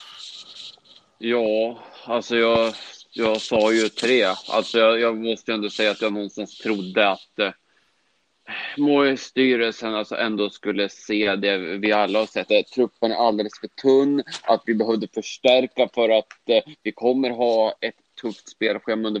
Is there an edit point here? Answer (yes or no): yes